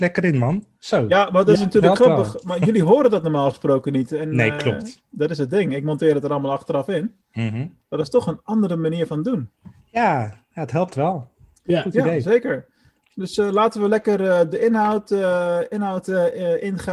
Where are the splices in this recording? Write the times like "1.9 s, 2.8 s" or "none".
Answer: none